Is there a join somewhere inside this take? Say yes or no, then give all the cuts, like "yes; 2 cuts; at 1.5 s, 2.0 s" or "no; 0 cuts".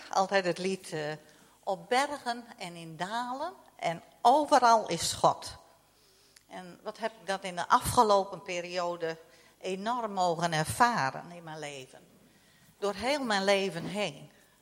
no; 0 cuts